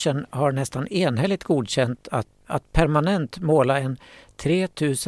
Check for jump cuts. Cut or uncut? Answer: cut